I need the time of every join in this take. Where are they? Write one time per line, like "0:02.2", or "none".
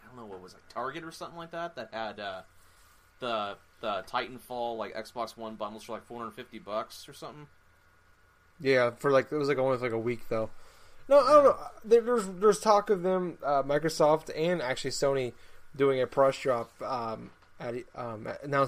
none